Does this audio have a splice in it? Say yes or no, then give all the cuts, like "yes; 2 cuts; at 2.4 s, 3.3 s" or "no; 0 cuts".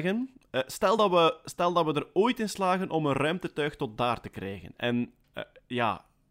no; 0 cuts